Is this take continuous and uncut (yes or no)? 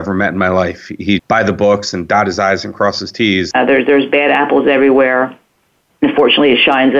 no